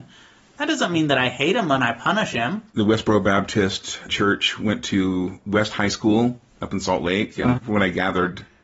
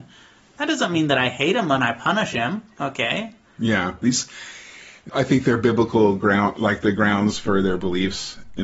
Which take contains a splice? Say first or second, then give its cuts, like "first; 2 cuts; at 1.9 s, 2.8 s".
first; 3 cuts; at 2.7 s, 4.1 s, 7.6 s